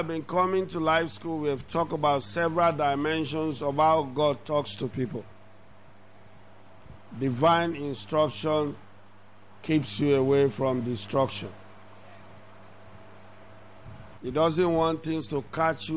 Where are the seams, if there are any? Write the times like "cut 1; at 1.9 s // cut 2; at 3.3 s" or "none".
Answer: cut 1; at 7.1 s // cut 2; at 14.2 s